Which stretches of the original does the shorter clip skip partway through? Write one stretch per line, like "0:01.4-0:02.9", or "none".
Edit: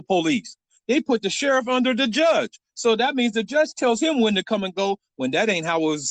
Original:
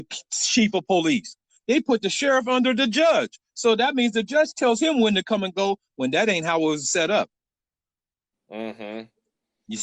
none